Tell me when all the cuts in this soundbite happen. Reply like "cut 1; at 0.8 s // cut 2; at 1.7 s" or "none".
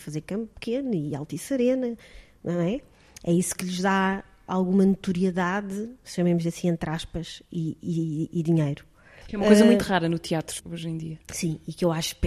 cut 1; at 9.2 s // cut 2; at 10.6 s

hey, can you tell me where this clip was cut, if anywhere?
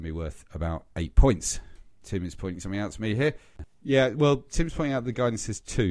none

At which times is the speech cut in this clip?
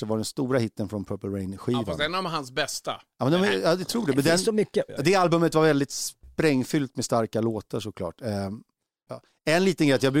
cut 1; at 4.9 s // cut 2; at 9.1 s

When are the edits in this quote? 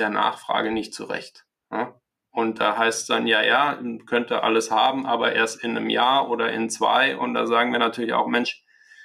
none

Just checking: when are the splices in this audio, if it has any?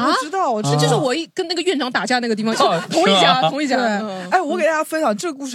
cut 1; at 2.5 s

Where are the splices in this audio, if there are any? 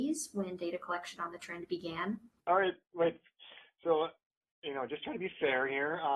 cut 1; at 2.4 s

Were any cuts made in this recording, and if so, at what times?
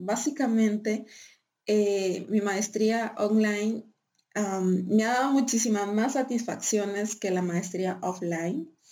none

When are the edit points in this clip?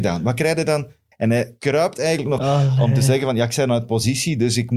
cut 1; at 1.1 s // cut 2; at 2.4 s

